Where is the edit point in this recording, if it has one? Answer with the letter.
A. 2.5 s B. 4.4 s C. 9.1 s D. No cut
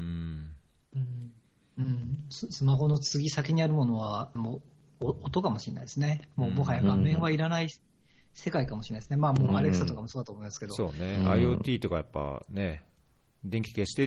B